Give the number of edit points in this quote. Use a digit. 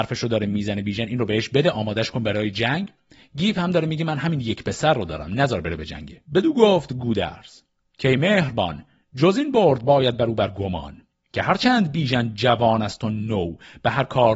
1